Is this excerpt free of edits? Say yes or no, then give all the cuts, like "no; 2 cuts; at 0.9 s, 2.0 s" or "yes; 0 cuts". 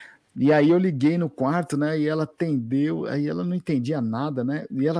yes; 0 cuts